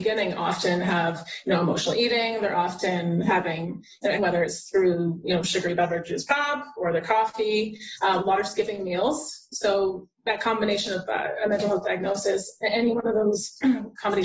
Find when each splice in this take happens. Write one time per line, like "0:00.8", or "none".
0:04.2
0:09.5